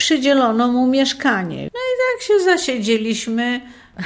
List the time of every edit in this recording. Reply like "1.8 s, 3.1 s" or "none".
1.7 s